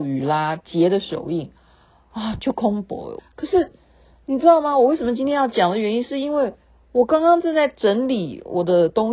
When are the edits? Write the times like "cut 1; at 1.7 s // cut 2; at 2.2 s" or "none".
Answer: cut 1; at 3.2 s